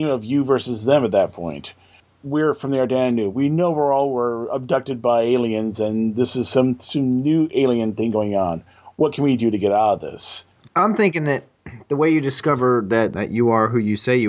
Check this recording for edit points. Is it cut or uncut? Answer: uncut